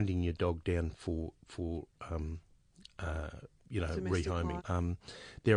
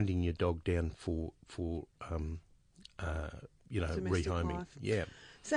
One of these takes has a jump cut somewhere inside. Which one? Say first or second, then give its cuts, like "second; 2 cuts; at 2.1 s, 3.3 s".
first; 1 cut; at 4.6 s